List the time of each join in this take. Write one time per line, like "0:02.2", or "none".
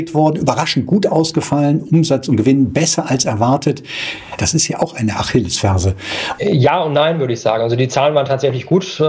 0:04.4
0:06.4